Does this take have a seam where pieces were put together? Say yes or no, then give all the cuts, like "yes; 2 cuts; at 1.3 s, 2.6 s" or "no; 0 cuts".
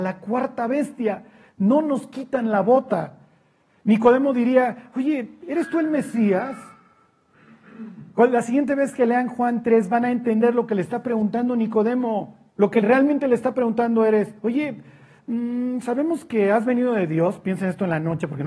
no; 0 cuts